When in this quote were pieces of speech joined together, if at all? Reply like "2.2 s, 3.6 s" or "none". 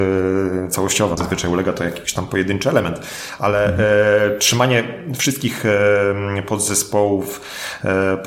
1.2 s